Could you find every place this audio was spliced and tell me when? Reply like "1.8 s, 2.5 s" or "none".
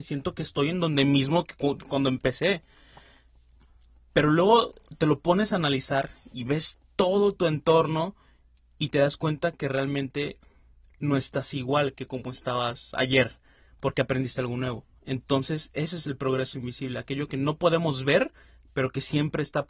1.9 s, 15.0 s